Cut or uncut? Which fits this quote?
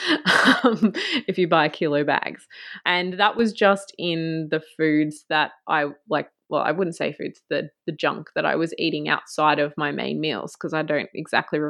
cut